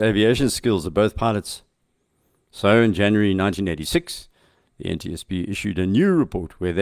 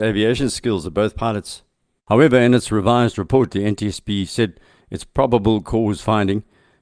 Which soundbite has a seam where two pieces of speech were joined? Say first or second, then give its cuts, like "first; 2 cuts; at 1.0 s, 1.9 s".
second; 1 cut; at 2.0 s